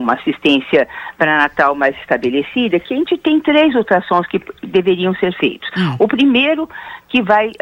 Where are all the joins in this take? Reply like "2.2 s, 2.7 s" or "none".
none

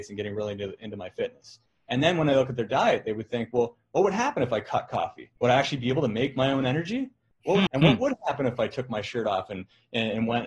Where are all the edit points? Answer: 5.4 s, 7.7 s

